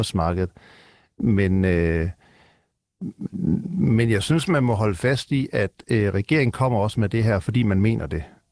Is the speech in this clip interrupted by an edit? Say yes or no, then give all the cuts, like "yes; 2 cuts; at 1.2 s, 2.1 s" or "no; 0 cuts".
no; 0 cuts